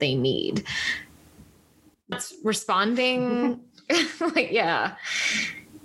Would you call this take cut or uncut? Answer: cut